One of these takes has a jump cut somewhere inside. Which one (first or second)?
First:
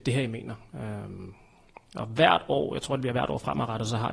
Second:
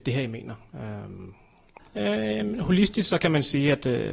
second